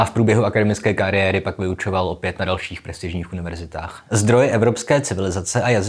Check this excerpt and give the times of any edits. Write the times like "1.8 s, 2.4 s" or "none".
4.1 s

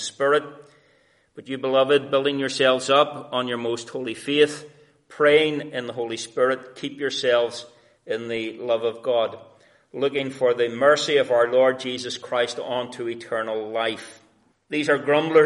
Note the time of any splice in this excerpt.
14.5 s

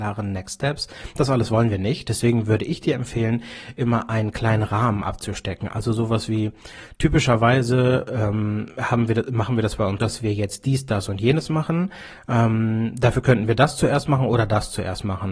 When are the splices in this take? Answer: 10.0 s

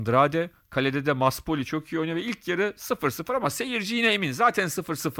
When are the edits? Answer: none

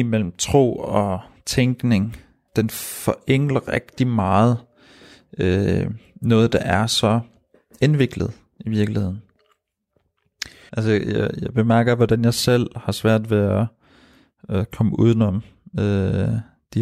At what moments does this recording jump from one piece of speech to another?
2.5 s, 10.7 s

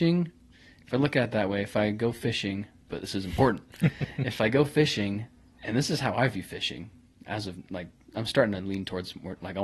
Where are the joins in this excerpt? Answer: 2.9 s

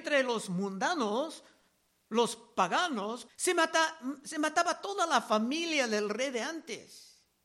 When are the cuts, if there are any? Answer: 3.3 s

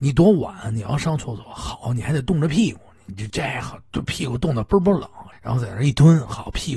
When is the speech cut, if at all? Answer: 3.3 s, 5.3 s

